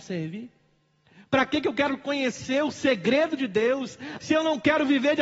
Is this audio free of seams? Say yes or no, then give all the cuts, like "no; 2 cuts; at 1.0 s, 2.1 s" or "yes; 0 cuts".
no; 1 cut; at 4.2 s